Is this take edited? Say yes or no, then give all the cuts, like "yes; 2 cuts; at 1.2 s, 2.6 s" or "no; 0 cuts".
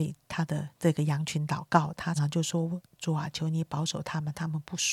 yes; 1 cut; at 2.2 s